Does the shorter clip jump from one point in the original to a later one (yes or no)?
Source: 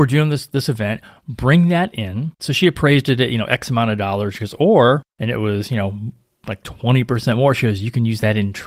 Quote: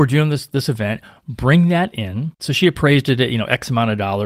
no